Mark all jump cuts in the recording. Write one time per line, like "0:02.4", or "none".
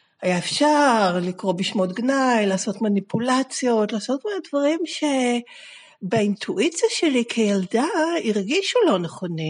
none